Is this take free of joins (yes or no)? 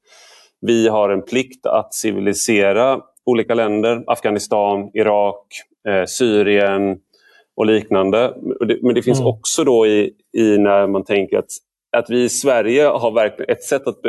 yes